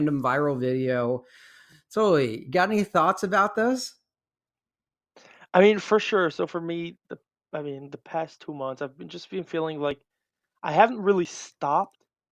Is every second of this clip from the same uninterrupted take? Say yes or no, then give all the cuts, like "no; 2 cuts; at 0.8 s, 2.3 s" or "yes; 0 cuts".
yes; 0 cuts